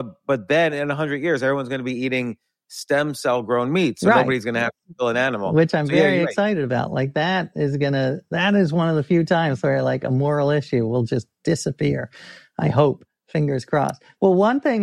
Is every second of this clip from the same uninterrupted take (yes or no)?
yes